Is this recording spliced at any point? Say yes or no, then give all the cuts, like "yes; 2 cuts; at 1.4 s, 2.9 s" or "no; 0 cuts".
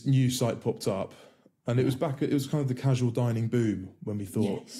no; 0 cuts